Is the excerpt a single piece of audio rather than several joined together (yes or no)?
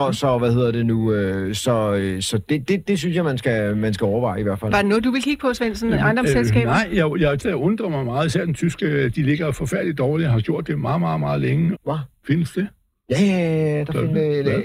no